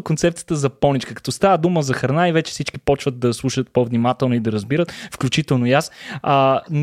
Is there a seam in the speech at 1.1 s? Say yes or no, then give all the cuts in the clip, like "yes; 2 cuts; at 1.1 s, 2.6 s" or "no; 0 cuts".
no; 0 cuts